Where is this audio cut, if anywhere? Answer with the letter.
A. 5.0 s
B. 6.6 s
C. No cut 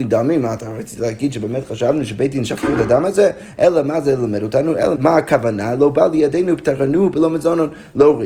A